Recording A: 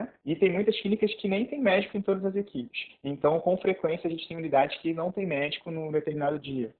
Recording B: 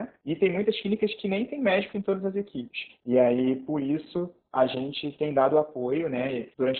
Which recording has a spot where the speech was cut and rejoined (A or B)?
B